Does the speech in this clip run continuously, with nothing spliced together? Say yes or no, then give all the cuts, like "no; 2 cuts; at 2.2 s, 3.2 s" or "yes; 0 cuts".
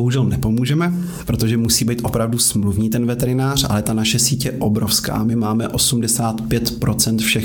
yes; 0 cuts